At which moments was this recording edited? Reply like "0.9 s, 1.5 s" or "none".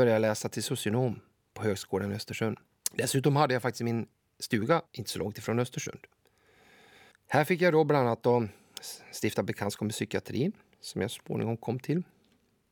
2.8 s, 4.9 s